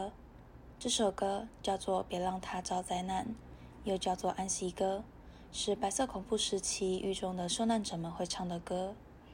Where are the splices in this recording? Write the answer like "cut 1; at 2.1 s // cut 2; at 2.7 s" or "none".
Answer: none